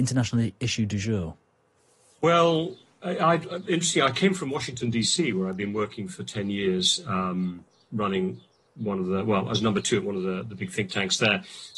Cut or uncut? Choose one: uncut